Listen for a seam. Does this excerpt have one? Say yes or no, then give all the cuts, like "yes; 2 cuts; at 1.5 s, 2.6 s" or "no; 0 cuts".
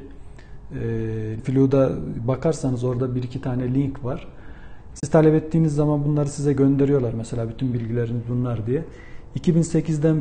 yes; 2 cuts; at 1.4 s, 4.9 s